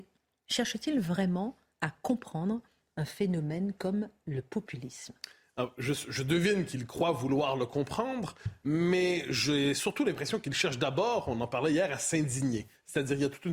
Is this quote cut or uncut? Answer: uncut